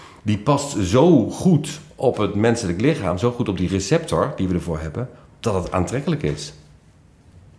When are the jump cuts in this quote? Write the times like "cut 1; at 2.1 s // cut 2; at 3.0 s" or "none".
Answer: none